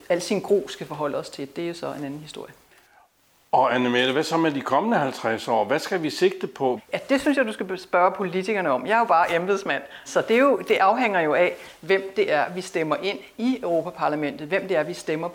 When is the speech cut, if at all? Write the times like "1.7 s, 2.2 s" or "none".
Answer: 6.8 s, 10.1 s